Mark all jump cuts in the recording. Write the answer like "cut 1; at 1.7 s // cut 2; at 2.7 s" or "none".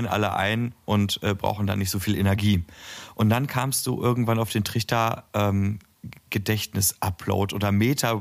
none